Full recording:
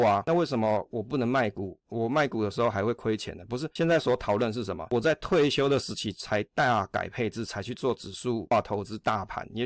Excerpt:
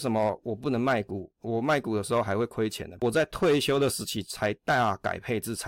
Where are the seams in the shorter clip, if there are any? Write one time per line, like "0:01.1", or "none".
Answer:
0:03.0